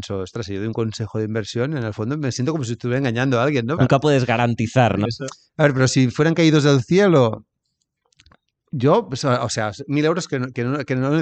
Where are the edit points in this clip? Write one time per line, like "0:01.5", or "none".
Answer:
0:03.8
0:05.1